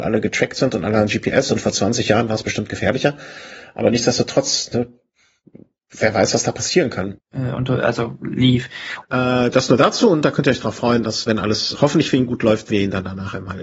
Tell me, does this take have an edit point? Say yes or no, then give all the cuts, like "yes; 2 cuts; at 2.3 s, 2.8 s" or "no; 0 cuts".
yes; 3 cuts; at 7.2 s, 9.0 s, 11.8 s